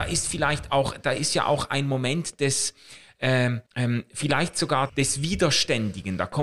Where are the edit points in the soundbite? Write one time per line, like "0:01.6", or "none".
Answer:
0:03.7
0:04.9